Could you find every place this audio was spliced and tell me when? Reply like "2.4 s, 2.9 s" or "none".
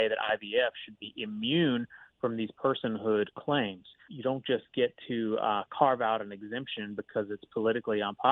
4.1 s